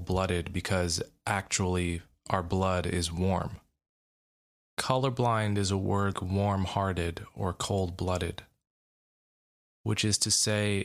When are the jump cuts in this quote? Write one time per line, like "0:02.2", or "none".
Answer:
0:04.6
0:06.1